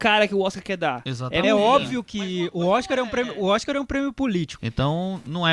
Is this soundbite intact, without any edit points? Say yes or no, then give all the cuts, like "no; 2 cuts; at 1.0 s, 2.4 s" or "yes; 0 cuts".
no; 2 cuts; at 1.4 s, 4.6 s